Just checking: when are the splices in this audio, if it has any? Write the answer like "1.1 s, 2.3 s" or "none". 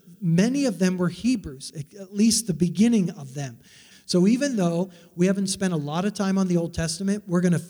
3.9 s